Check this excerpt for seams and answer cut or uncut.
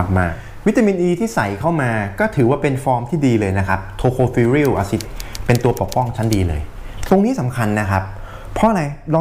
cut